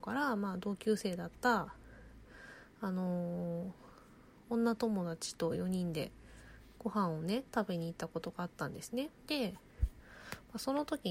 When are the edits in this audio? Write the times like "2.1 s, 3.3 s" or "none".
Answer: 9.2 s